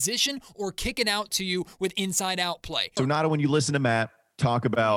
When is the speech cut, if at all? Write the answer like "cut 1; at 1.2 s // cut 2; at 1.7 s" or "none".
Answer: cut 1; at 3.0 s